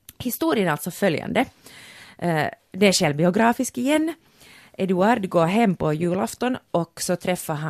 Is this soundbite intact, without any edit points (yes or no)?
yes